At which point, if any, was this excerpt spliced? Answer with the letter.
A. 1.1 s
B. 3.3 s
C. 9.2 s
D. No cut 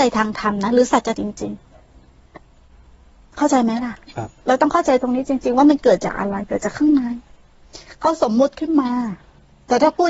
A